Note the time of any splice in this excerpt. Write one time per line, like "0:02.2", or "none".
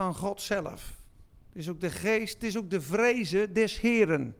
none